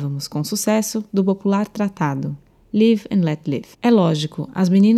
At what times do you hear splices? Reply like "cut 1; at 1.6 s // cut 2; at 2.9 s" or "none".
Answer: cut 1; at 3.7 s